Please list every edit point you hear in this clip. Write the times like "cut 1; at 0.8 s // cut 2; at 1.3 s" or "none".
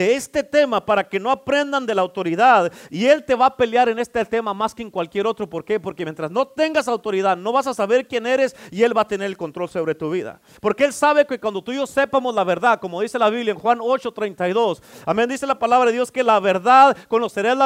cut 1; at 10.6 s